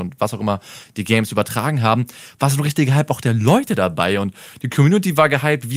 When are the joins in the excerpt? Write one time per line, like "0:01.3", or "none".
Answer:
none